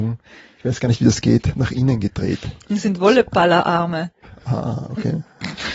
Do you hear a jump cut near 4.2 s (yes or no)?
no